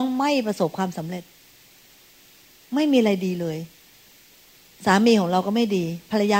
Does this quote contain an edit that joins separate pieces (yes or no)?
no